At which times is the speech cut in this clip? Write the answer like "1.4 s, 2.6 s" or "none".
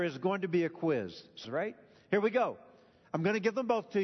1.4 s